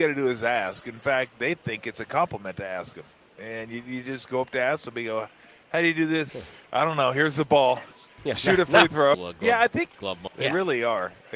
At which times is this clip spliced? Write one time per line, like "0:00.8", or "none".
0:06.3
0:09.1
0:10.3